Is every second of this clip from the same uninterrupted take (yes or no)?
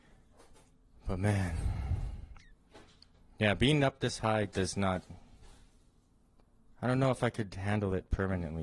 yes